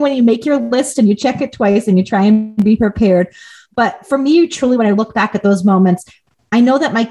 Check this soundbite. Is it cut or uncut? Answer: uncut